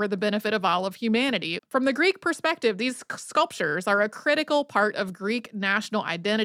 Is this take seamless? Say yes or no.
no